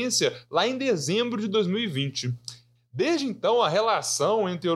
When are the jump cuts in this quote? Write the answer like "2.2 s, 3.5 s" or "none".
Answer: none